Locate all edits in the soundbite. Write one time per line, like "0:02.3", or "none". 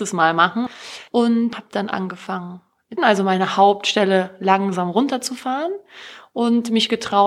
0:01.5
0:03.0

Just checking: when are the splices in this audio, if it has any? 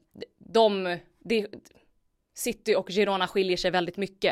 none

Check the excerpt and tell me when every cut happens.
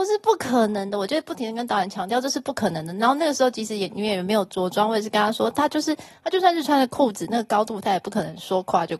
none

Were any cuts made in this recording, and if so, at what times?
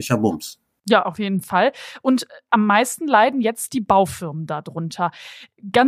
none

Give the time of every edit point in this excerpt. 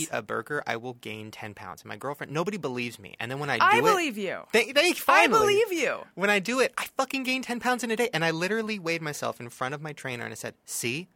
none

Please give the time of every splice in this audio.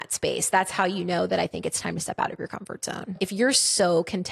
none

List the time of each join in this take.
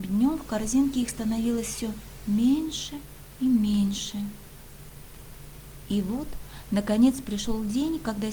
none

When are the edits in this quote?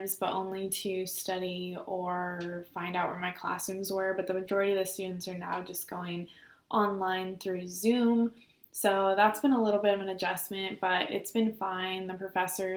none

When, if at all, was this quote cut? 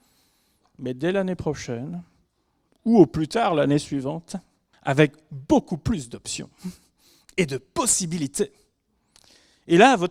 0:04.7

